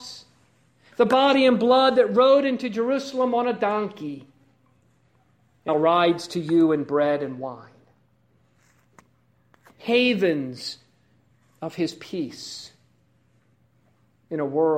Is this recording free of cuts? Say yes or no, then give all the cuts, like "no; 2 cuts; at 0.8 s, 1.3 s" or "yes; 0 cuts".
no; 1 cut; at 5.7 s